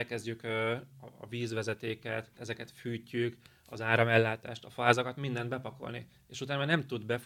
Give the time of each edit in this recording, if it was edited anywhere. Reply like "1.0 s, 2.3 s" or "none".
2.4 s